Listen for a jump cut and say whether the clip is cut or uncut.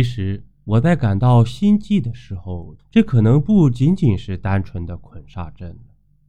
cut